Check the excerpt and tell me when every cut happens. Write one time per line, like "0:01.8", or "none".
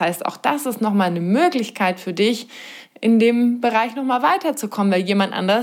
none